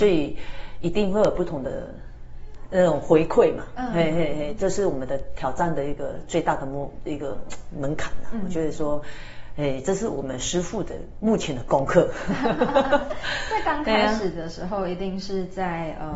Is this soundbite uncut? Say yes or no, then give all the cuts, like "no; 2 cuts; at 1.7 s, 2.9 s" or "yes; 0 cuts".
yes; 0 cuts